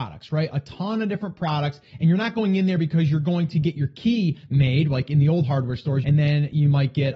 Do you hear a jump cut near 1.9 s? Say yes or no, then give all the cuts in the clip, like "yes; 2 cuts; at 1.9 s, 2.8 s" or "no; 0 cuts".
no; 1 cut; at 6.0 s